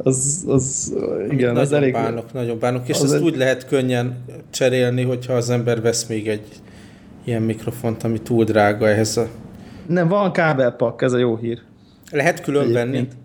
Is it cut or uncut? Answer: uncut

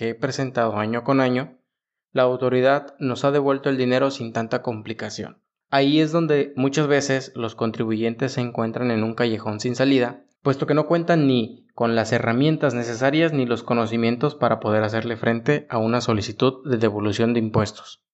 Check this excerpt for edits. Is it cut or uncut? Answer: cut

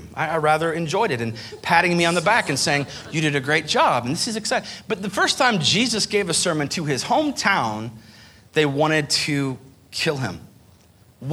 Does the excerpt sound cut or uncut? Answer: uncut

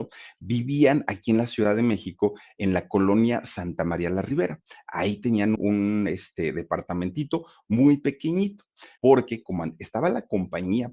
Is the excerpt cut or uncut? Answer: cut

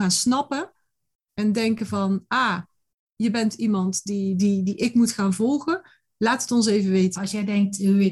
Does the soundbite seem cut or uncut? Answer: cut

